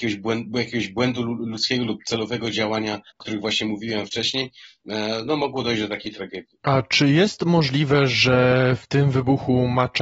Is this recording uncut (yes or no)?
no